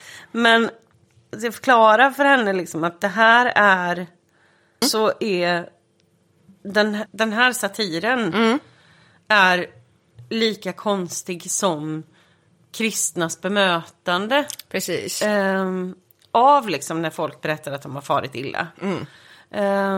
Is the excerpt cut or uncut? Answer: cut